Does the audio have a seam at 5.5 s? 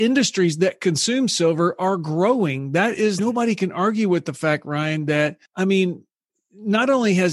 yes; 2 cuts; at 3.2 s, 5.5 s

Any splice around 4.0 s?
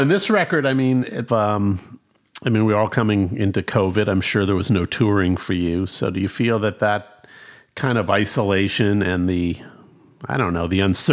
no; 1 cut; at 1.3 s

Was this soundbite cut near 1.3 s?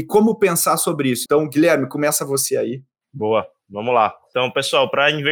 yes; 1 cut; at 1.3 s

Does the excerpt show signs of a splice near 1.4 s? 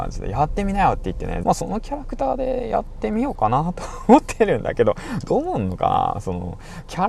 yes; 1 cut; at 1.4 s

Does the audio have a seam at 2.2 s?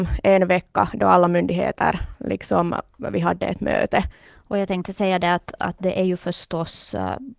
no; 1 cut; at 4.3 s

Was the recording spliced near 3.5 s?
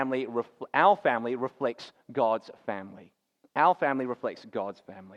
no; 0 cuts

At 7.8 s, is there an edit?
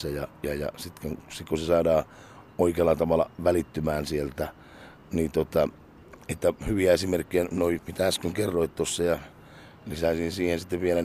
yes; 1 cut; at 7.8 s

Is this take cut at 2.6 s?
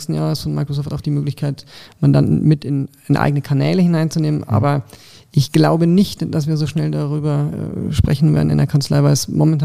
no; 0 cuts

